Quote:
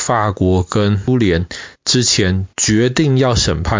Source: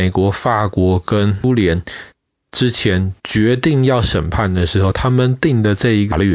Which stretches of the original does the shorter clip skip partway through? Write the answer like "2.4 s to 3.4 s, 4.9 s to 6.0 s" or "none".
2.1 s to 2.4 s